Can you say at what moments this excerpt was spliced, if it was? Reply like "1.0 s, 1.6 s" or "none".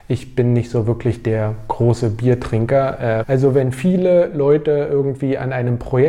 3.2 s